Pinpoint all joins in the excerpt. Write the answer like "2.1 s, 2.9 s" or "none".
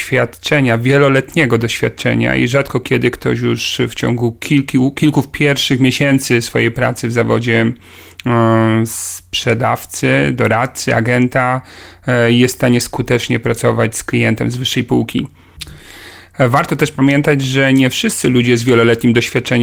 none